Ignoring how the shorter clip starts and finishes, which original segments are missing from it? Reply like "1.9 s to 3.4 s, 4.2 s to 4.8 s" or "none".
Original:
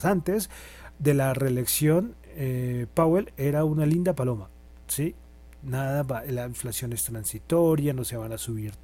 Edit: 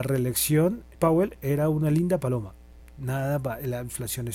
2.3 s to 2.9 s, 4.7 s to 5.4 s